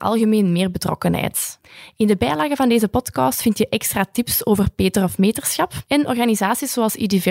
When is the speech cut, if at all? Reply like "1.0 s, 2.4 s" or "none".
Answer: 5.8 s